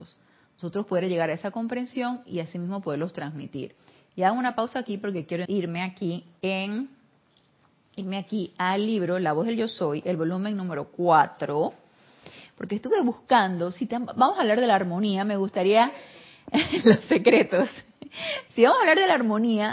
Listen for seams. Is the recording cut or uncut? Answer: cut